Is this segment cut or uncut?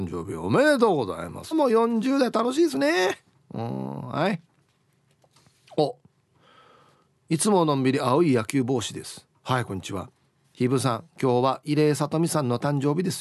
cut